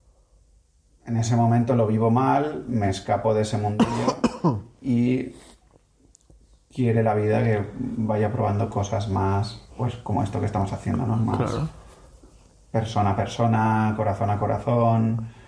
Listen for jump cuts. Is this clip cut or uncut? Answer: cut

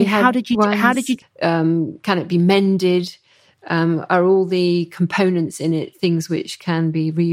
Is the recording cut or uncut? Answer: cut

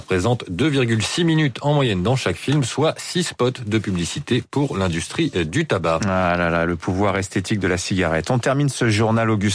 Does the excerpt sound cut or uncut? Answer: uncut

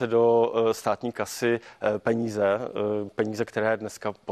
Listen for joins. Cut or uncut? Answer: uncut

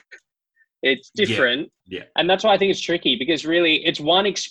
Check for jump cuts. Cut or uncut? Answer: cut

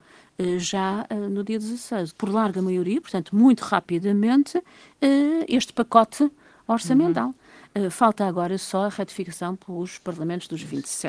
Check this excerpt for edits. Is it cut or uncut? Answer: cut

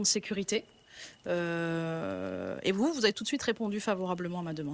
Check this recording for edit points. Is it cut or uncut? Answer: uncut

